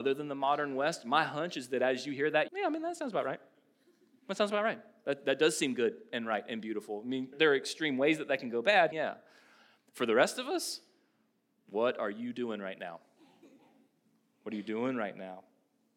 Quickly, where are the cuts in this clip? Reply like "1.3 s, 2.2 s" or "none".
2.5 s, 7.3 s, 8.9 s